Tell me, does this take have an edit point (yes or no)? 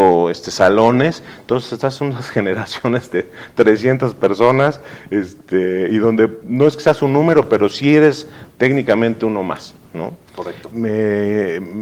yes